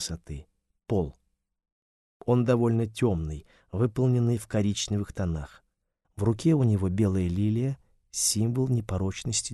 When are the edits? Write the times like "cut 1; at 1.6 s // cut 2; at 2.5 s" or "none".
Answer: cut 1; at 6.0 s